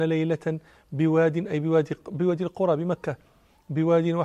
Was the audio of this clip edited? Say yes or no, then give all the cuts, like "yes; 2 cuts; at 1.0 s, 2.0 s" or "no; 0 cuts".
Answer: no; 0 cuts